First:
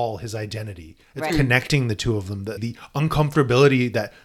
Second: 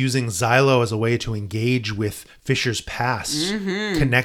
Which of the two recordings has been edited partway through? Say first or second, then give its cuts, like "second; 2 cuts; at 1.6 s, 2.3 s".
first; 2 cuts; at 1.3 s, 2.6 s